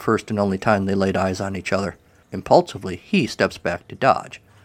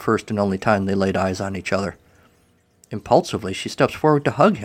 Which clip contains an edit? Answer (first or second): first